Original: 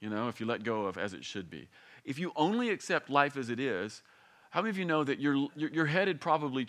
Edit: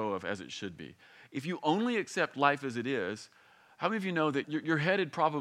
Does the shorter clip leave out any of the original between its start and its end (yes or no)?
yes